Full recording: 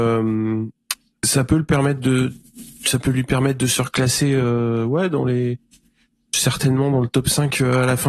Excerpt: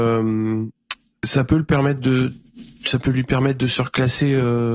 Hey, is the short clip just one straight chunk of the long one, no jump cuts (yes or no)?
yes